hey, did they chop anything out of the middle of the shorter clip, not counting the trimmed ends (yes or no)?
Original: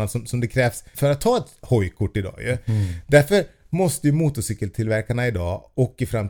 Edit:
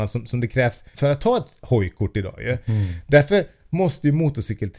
no